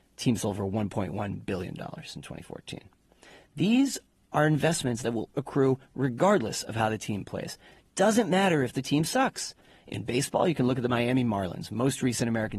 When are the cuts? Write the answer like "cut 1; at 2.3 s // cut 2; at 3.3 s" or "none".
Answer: cut 1; at 5.3 s